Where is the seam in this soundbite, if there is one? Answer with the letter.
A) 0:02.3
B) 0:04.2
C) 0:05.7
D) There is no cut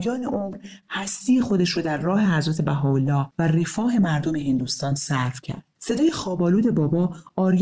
C